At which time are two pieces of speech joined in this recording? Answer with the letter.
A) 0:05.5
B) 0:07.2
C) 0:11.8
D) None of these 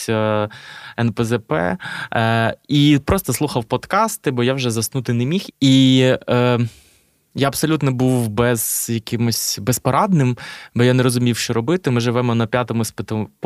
A